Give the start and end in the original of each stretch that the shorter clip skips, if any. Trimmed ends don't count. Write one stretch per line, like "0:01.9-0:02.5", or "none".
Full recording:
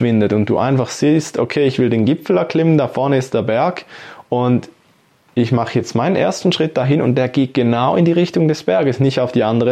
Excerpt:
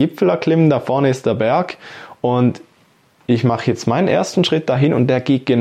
none

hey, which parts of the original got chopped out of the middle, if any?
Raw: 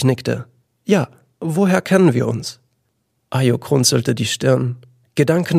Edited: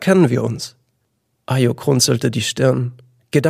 none

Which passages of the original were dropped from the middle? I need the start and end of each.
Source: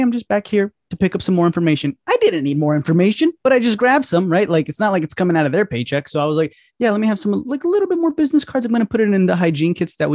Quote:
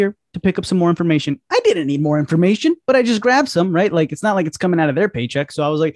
none

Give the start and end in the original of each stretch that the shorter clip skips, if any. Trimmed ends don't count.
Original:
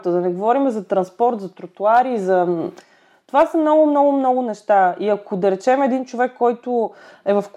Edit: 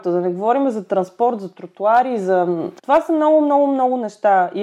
0:02.8-0:03.2

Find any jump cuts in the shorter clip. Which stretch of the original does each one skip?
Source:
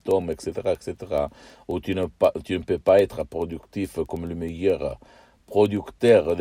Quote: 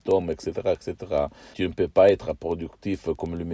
0:01.5-0:02.4

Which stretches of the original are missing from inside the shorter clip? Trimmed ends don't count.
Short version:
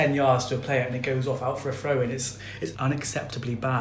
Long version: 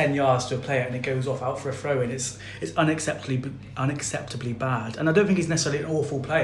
0:02.7-0:03.7

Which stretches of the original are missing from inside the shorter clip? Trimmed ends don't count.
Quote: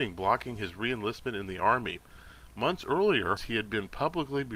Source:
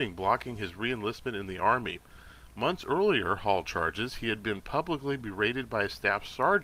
0:03.4-0:04.1

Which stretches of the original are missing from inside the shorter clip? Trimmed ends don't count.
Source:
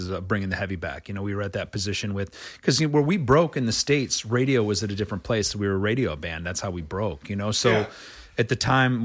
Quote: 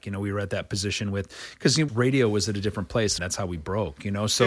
0:02.9-0:04.2
0:05.5-0:06.4

